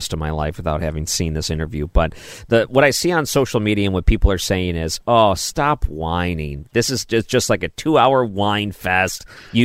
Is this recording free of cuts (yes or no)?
yes